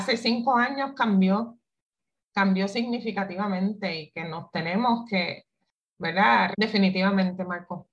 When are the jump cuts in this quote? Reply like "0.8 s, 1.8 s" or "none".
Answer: 6.5 s